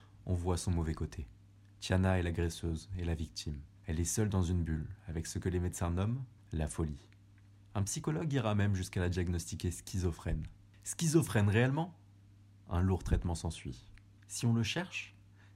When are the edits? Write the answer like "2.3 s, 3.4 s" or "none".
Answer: 6.4 s, 14.2 s